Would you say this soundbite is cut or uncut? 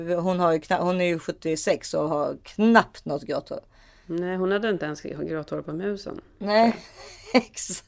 uncut